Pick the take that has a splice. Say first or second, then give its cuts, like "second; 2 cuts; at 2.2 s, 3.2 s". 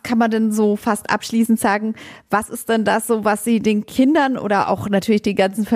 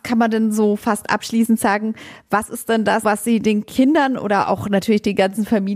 second; 1 cut; at 3.0 s